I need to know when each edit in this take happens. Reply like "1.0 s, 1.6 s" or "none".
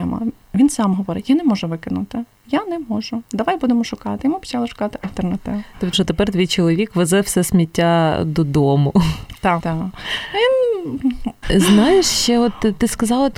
5.9 s, 9.6 s, 11.4 s